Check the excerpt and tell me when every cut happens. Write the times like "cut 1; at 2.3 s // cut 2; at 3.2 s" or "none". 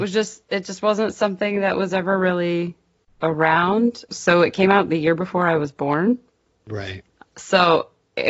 cut 1; at 4.1 s